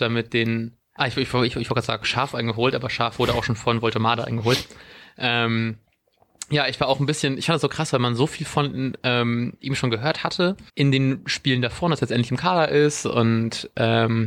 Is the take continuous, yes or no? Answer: no